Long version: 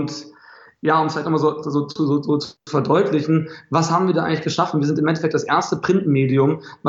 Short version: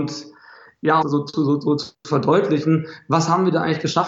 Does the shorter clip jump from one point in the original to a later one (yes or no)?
yes